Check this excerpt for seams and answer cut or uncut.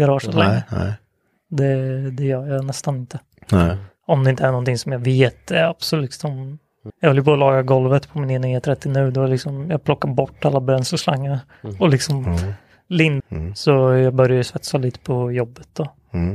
cut